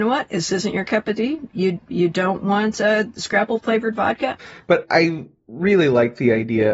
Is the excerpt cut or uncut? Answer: cut